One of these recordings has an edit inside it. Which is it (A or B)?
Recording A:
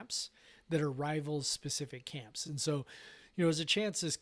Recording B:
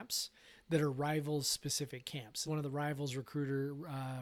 B